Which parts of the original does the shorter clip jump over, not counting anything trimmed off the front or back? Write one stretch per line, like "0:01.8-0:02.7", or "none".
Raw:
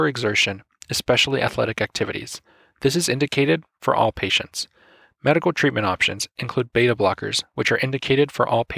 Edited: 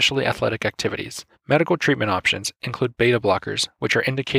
0:02.5-0:05.1